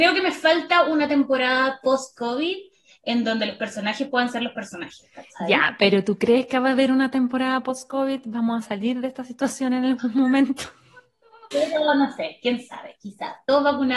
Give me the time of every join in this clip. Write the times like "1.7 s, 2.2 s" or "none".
11.5 s